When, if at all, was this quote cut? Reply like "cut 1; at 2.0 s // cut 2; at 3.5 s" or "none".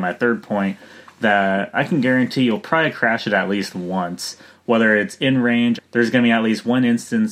cut 1; at 5.8 s

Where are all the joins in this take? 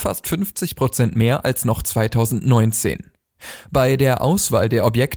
none

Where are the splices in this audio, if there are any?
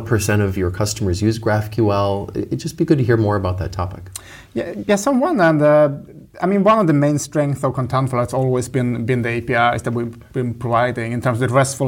none

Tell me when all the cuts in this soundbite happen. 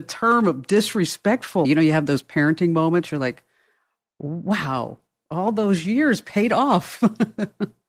cut 1; at 1.6 s

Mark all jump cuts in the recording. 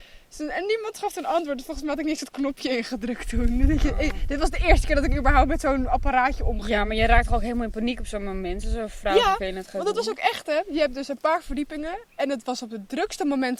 none

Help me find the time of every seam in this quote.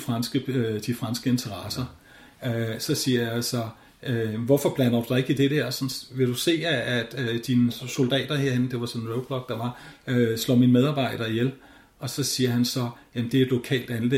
none

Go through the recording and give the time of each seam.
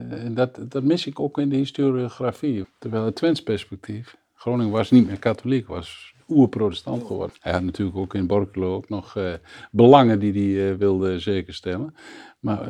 cut 1; at 2.6 s // cut 2; at 7.3 s

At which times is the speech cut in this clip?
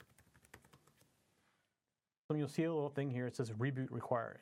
cut 1; at 2.3 s

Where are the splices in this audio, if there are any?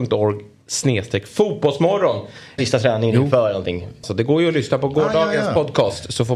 cut 1; at 2.6 s // cut 2; at 4.0 s

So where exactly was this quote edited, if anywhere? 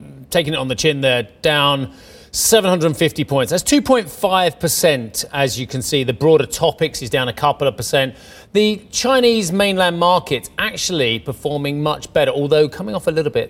none

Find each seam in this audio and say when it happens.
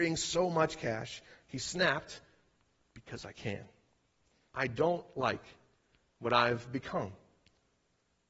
cut 1; at 4.5 s

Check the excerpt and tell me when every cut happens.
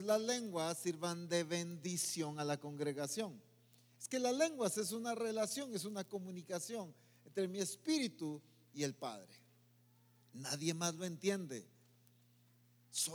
none

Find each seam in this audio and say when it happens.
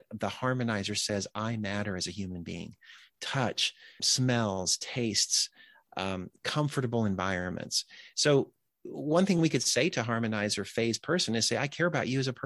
cut 1; at 4.0 s

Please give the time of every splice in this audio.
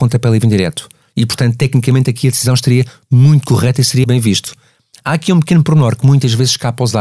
cut 1; at 4.0 s

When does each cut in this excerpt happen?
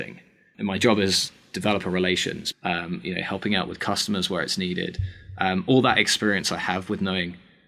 cut 1; at 2.5 s

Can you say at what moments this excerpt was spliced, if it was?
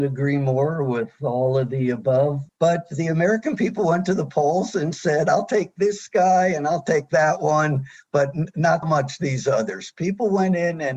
cut 1; at 2.5 s // cut 2; at 8.8 s

